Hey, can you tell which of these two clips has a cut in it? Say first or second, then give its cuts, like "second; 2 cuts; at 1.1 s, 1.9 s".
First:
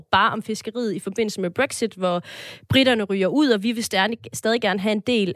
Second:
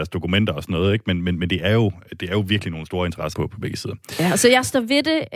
second; 1 cut; at 3.3 s